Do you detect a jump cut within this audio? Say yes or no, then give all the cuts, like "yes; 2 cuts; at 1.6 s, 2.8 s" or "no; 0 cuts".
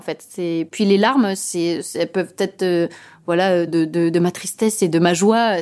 yes; 1 cut; at 3.7 s